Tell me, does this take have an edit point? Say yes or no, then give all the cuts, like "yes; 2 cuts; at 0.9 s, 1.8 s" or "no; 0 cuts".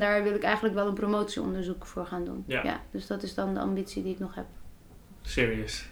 no; 0 cuts